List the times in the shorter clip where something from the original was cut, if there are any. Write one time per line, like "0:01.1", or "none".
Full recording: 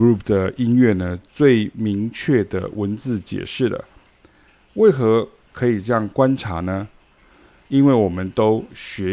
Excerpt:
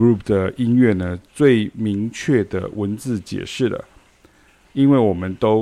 0:04.6